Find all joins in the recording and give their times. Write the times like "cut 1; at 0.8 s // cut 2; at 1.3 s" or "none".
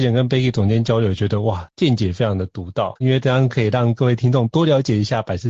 cut 1; at 3.0 s